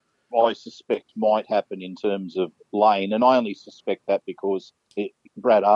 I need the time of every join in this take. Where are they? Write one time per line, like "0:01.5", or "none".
none